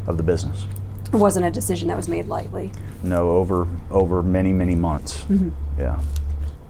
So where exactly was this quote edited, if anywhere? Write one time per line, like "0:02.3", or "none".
none